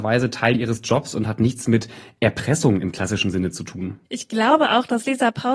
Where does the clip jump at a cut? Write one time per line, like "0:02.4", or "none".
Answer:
0:04.1